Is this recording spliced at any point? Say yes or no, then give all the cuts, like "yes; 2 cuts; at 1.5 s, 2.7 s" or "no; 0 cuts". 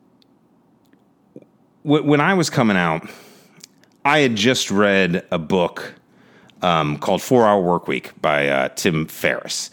no; 0 cuts